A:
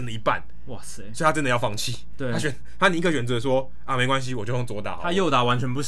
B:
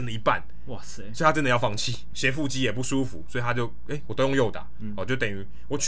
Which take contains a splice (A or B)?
B